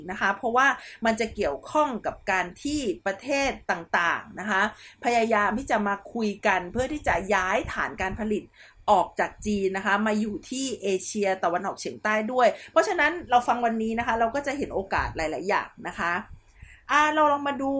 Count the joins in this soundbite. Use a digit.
1